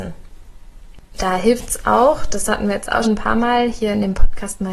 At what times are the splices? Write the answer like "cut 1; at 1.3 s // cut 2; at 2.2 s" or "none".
cut 1; at 3.0 s